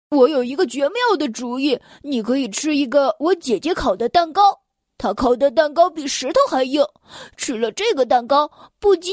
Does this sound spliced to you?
no; 0 cuts

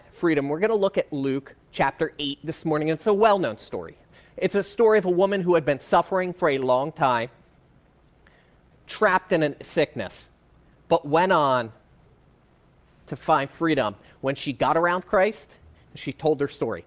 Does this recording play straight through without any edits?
yes; 0 cuts

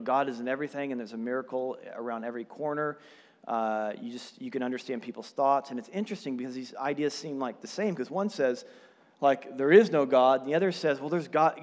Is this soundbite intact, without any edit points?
yes; 0 cuts

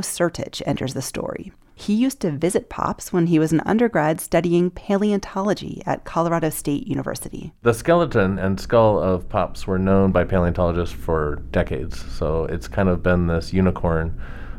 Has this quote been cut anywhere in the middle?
no; 0 cuts

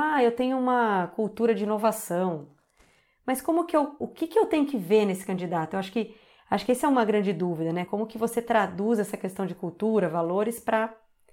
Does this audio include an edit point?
no; 0 cuts

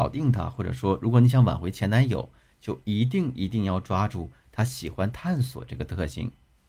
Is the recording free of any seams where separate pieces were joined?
yes; 0 cuts

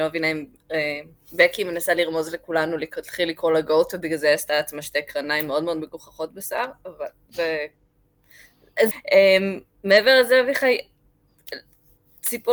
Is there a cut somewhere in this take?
yes; 1 cut; at 8.9 s

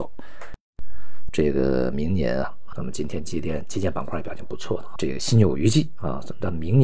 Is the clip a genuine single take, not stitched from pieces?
no; 3 cuts; at 1.3 s, 2.7 s, 5.0 s

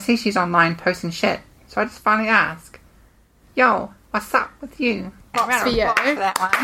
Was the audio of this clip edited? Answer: yes; 1 cut; at 5.3 s

